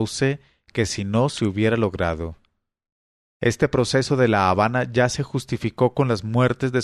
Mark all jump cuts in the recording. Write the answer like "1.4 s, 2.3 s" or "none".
3.3 s